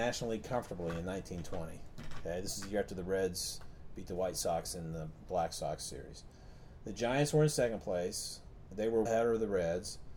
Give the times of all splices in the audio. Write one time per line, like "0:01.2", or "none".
0:09.1

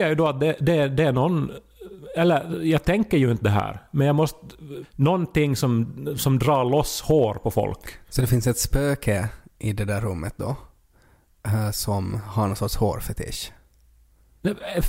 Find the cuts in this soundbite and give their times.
0:04.8

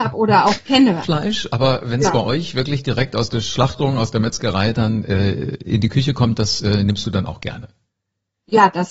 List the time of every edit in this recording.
0:01.0

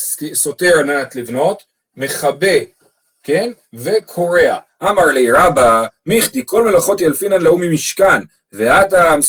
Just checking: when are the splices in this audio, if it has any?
0:04.7

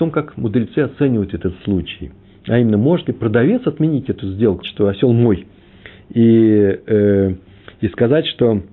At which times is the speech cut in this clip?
0:04.6

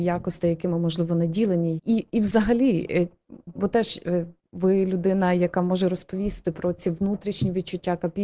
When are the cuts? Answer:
0:01.8
0:03.5

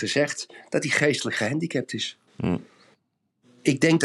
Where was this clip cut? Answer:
0:02.3

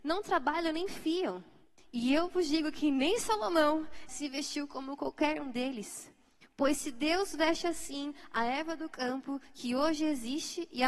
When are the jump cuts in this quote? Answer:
0:04.1

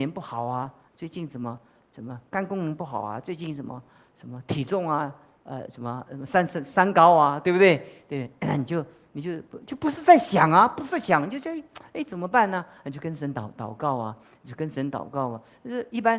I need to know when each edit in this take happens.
none

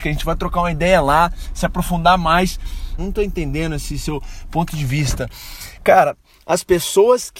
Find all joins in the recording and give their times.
0:03.0

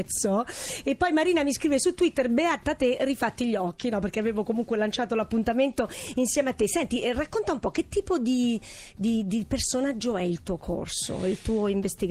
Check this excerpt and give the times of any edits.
none

